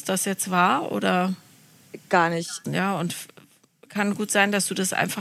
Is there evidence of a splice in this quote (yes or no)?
yes